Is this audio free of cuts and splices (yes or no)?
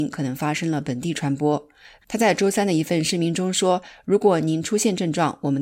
no